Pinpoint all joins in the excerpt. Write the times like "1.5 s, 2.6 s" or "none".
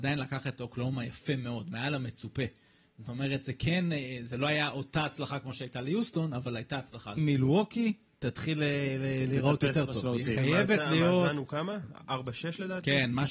7.2 s